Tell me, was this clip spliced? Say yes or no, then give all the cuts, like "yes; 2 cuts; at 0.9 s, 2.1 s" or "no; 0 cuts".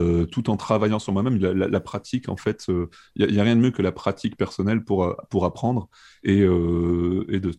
no; 0 cuts